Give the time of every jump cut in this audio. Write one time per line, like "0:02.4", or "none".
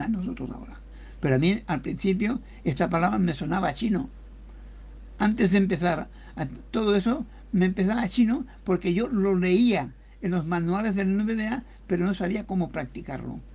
none